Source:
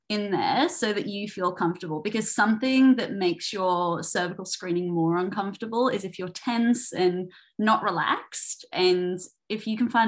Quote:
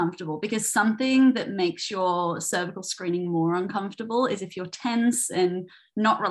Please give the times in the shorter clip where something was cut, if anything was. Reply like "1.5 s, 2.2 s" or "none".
none